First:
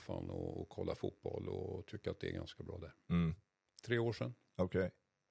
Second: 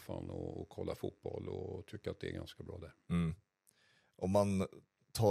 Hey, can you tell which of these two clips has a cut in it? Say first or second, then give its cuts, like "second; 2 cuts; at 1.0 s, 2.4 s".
first; 1 cut; at 3.7 s